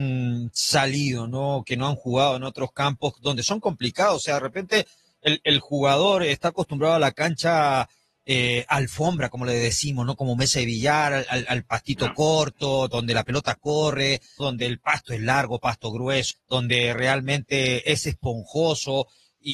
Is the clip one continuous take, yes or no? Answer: no